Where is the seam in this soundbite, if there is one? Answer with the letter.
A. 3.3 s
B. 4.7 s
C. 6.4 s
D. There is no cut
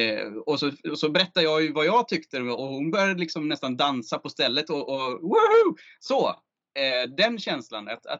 D